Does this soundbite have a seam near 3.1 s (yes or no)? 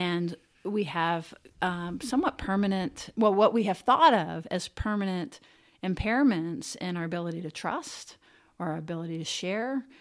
yes